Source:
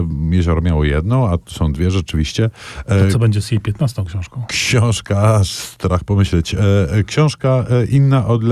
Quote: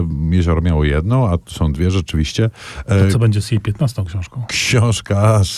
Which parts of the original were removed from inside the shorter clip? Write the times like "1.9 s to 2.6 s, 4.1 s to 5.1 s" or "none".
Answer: none